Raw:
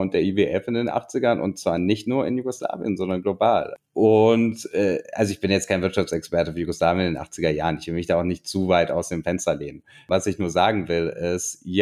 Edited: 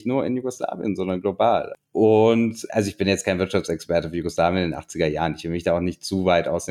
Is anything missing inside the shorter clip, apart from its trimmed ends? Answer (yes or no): yes